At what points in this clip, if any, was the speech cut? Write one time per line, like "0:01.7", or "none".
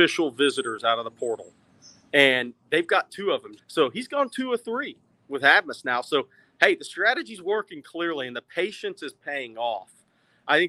0:03.6